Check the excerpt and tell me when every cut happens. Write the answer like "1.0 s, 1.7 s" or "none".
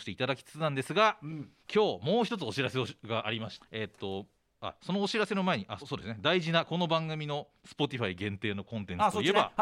1.6 s, 3.6 s, 5.8 s